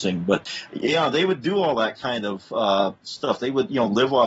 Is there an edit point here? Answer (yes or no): no